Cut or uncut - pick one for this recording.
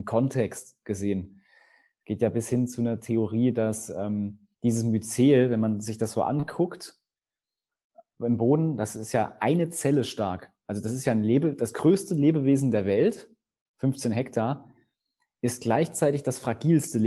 cut